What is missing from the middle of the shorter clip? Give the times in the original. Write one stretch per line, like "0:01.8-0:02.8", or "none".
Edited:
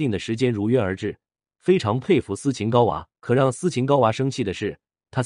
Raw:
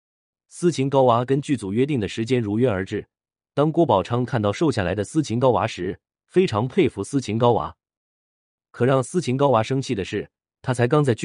0:03.3-0:06.1
0:07.8-0:08.7